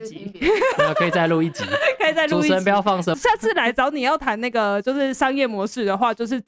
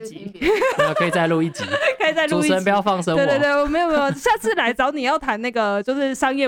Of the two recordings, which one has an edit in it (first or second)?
first